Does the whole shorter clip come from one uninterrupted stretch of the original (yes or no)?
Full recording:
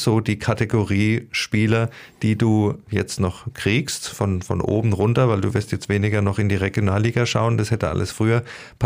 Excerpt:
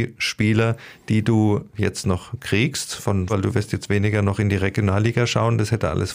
no